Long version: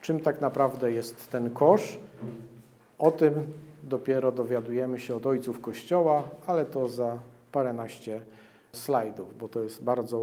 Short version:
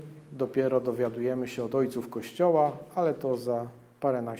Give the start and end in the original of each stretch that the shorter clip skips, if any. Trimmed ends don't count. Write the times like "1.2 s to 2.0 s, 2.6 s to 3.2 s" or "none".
none